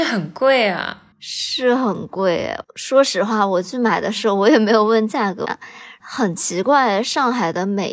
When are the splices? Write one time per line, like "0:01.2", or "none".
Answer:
0:01.1
0:05.5